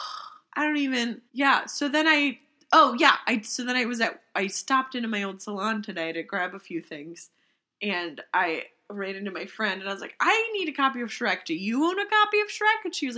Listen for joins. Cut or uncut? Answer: cut